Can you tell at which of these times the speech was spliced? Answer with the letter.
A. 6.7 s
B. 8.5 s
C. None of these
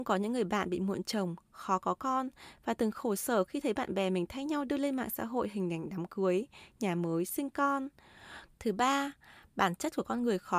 B